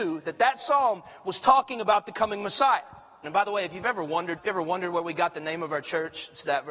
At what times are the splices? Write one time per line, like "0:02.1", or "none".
0:03.2
0:04.4